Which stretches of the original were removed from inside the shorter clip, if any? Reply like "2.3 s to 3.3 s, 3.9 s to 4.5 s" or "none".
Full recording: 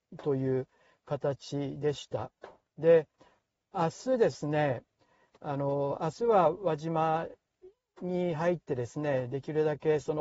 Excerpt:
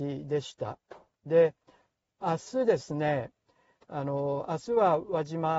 none